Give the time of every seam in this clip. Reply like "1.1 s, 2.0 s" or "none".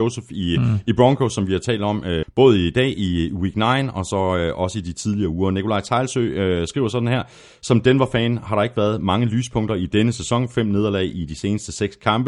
2.2 s